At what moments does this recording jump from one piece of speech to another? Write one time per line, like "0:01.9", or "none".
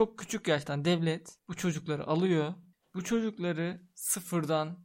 none